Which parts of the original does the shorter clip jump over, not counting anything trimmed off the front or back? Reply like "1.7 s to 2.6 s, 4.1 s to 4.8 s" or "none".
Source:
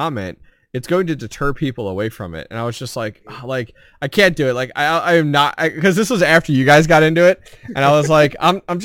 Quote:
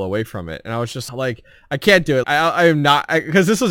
2.9 s to 3.4 s, 4.5 s to 4.7 s

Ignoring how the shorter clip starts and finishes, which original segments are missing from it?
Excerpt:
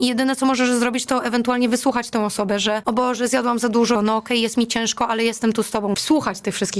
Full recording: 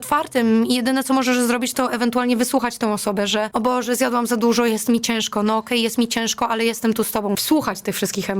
4.6 s to 5.4 s

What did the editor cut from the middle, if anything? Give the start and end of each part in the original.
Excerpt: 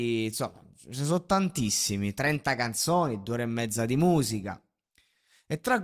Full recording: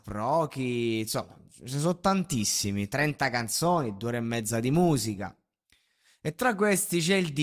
none

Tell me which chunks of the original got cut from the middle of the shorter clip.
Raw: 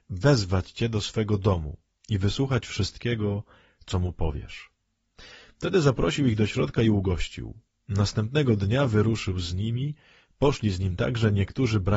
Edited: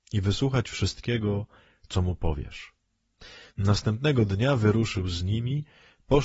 5.5 s to 7.8 s

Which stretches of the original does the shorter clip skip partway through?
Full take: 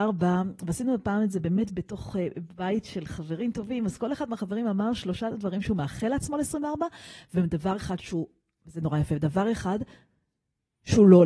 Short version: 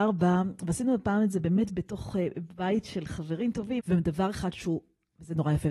3.8 s to 7.3 s

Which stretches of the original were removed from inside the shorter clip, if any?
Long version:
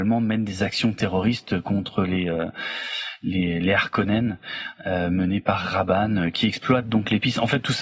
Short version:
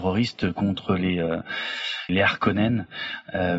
3.2 s to 3.6 s

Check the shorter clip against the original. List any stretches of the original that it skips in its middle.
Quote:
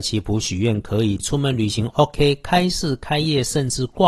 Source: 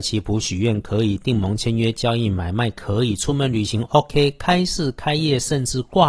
1.2 s to 3.2 s

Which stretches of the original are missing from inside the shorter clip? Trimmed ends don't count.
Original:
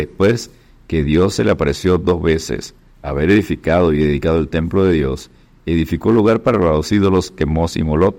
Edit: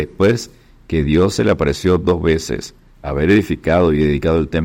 none

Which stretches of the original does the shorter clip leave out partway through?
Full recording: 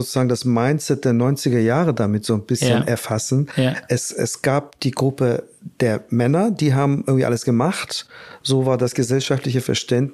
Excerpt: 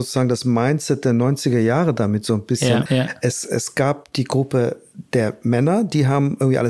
2.9 s to 3.5 s

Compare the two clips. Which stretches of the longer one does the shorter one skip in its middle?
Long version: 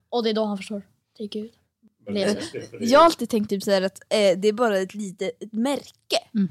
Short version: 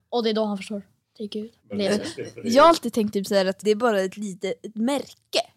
1.6 s to 2.0 s, 4.0 s to 4.4 s

